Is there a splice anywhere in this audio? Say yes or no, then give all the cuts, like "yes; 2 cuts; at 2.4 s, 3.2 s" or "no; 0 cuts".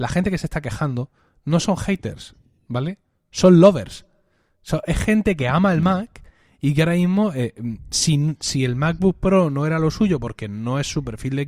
no; 0 cuts